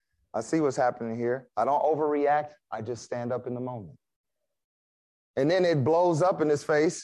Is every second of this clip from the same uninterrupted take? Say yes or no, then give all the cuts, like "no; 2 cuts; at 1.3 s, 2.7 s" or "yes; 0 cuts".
yes; 0 cuts